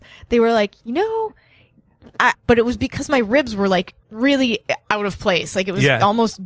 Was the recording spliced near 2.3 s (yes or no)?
yes